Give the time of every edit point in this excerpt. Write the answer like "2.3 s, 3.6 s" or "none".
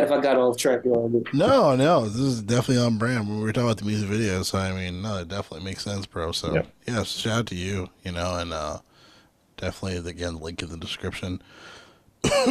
none